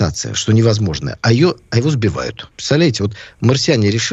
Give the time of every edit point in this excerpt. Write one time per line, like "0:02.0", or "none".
0:02.5